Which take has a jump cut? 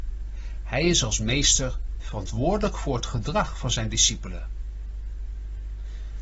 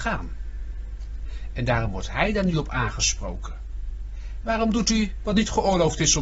second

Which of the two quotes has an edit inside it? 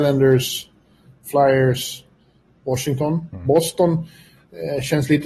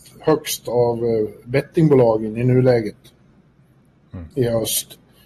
first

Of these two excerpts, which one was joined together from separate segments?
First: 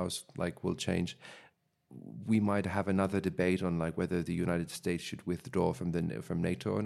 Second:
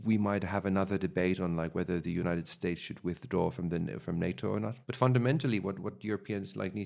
second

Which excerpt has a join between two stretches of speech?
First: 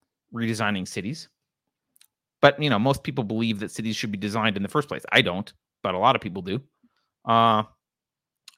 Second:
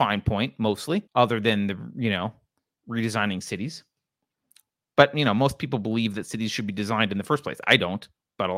second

